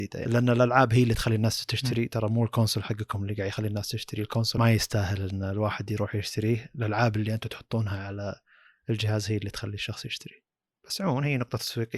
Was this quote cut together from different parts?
no; 0 cuts

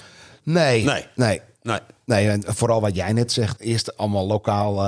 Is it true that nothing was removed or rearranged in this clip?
no; 1 cut; at 3.6 s

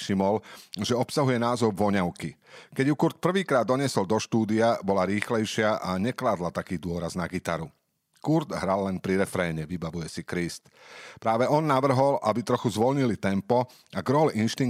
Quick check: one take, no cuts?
yes; 0 cuts

